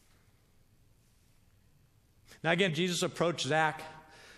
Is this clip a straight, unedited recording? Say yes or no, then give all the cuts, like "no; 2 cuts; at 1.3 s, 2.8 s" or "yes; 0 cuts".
no; 1 cut; at 2.7 s